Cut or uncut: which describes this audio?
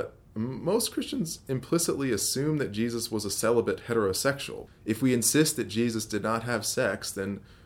cut